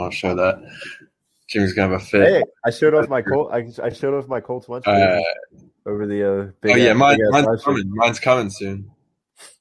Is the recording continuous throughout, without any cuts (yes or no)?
yes